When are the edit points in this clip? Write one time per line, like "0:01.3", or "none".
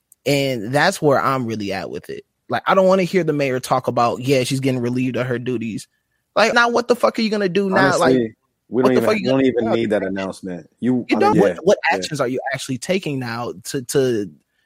0:06.5
0:11.3